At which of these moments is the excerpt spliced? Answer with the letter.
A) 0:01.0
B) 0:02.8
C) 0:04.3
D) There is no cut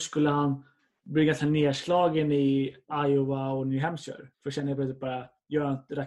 C